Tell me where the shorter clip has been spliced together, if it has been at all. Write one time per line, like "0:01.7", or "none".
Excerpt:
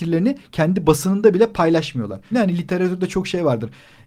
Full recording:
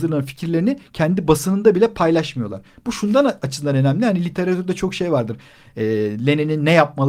0:02.3